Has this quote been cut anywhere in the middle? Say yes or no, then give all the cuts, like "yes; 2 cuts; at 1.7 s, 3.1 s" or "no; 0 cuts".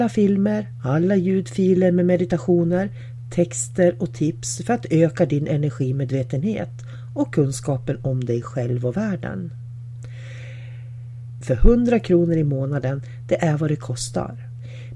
yes; 1 cut; at 11.4 s